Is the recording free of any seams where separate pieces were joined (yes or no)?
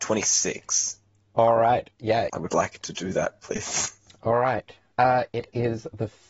no